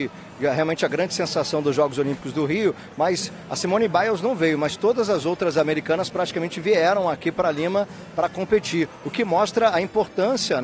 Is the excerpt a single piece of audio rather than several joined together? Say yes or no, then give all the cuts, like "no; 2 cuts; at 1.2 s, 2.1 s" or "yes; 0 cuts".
yes; 0 cuts